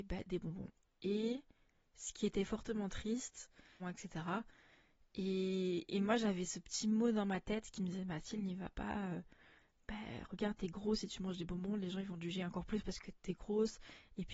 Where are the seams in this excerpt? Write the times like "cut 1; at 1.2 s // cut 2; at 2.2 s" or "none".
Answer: cut 1; at 3.8 s

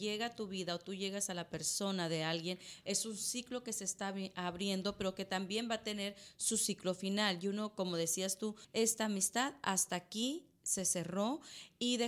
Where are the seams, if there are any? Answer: cut 1; at 8.6 s

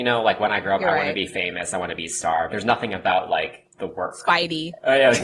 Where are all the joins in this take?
cut 1; at 2.5 s // cut 2; at 3.7 s

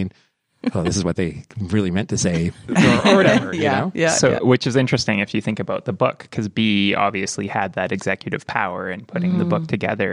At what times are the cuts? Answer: none

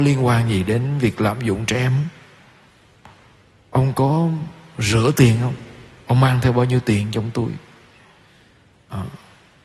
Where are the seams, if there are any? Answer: none

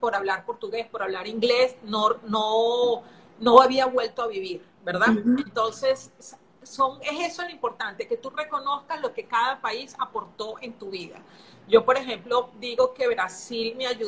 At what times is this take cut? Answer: none

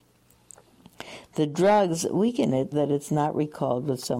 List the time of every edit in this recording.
cut 1; at 2.7 s

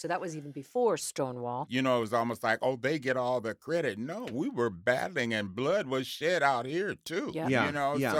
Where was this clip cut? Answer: cut 1; at 1.7 s

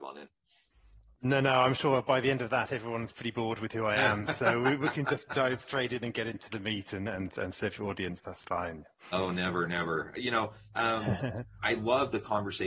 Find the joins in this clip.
cut 1; at 11.6 s

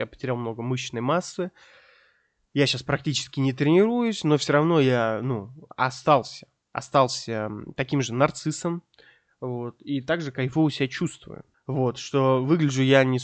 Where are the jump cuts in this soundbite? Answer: cut 1; at 11.5 s

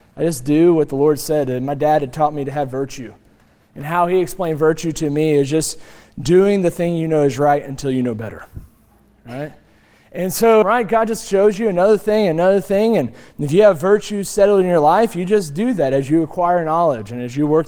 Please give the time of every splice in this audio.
cut 1; at 10.6 s

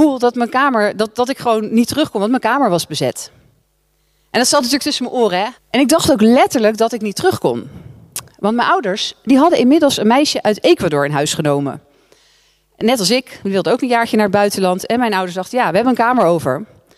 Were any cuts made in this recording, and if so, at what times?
cut 1; at 5.6 s

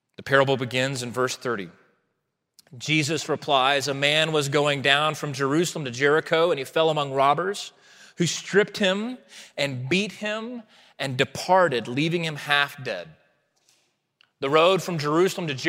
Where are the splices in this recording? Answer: none

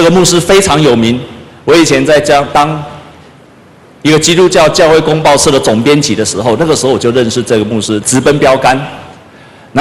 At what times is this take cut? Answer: cut 1; at 8.0 s

